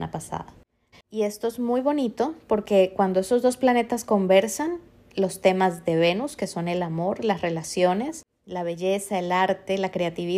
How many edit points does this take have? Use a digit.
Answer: 1